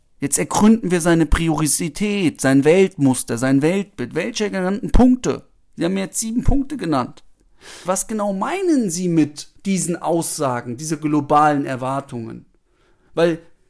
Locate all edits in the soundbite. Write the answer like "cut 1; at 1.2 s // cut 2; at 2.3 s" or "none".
cut 1; at 7.9 s // cut 2; at 9.6 s